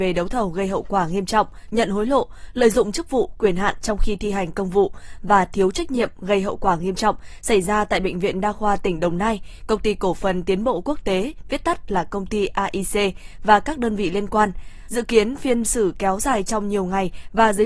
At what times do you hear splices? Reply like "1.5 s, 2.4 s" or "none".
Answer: 1.7 s, 14.9 s